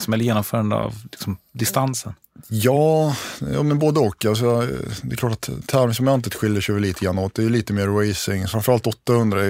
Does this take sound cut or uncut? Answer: cut